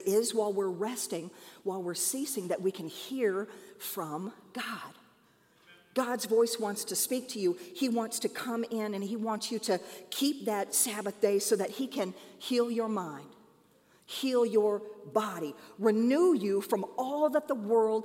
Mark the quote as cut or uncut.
uncut